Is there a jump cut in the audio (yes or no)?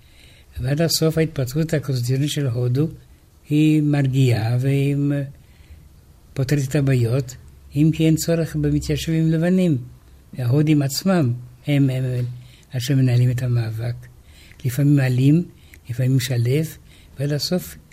no